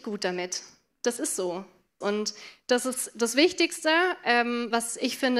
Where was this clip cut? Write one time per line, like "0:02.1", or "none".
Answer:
0:02.0